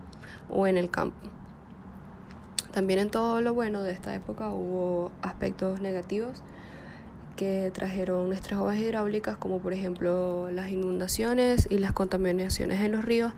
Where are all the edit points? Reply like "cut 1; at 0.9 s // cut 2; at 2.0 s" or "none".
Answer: none